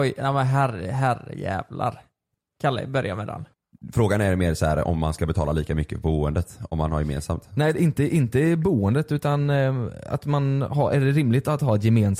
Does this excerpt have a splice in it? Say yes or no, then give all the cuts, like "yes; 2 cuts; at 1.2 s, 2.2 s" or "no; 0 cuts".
no; 0 cuts